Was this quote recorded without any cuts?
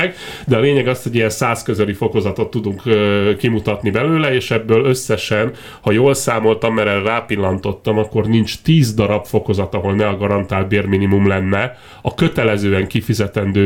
yes; 0 cuts

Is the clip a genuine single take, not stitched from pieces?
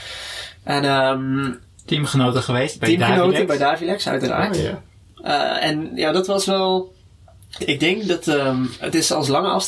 yes; 0 cuts

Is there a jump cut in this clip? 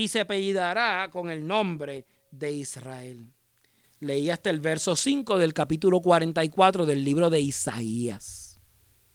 no; 0 cuts

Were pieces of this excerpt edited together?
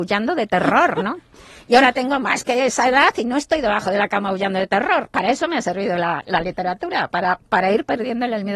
no; 0 cuts

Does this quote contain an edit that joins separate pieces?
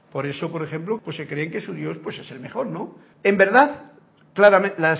yes; 2 cuts; at 1.0 s, 3.1 s

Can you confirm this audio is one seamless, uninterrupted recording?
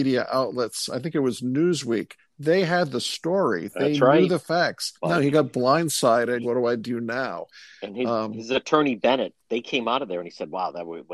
no; 2 cuts; at 5.0 s, 6.4 s

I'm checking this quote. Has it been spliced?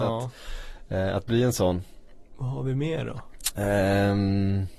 no; 0 cuts

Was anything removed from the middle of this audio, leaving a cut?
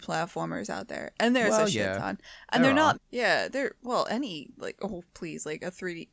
yes; 1 cut; at 2.9 s

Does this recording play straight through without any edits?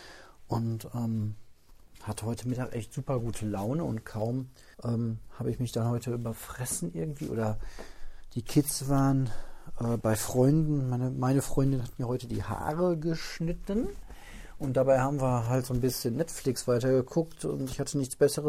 no; 1 cut; at 4.7 s

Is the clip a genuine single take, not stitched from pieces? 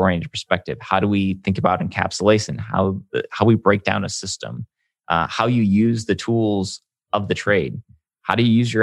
yes; 0 cuts

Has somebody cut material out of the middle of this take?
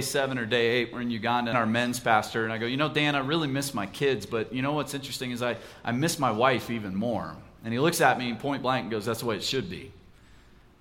yes; 1 cut; at 1.5 s

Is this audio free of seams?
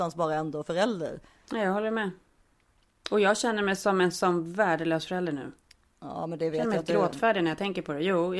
yes; 0 cuts

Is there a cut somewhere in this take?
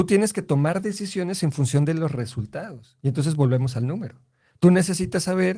no; 0 cuts

